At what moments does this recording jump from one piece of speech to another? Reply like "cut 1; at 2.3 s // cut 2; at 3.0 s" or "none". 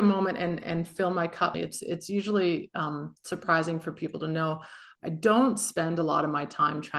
cut 1; at 1.5 s